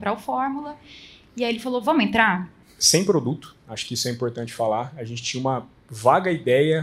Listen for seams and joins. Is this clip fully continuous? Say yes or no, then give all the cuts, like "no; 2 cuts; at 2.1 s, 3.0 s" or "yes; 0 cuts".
no; 1 cut; at 2.6 s